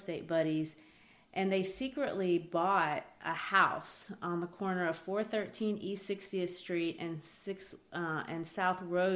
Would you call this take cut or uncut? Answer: uncut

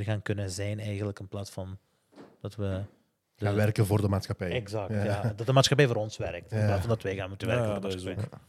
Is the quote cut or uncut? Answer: uncut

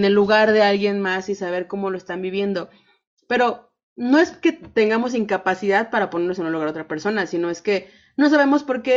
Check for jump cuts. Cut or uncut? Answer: uncut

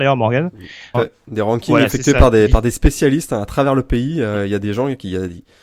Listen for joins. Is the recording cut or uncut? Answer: cut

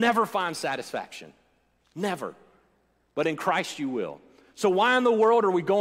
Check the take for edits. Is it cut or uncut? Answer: uncut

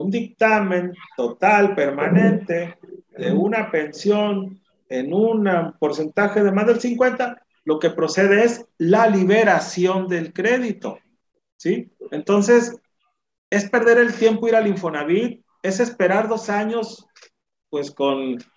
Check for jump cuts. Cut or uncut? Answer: uncut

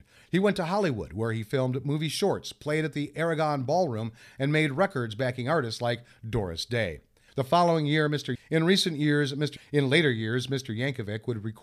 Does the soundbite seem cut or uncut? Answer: cut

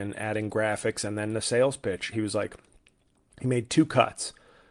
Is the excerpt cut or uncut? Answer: cut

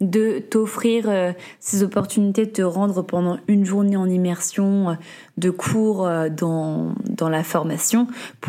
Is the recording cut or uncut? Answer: uncut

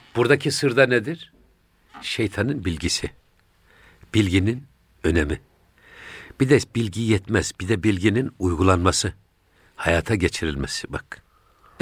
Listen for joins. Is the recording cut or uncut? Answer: uncut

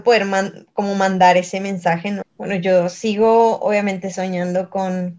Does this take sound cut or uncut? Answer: cut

